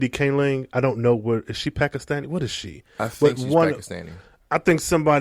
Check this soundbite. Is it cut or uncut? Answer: uncut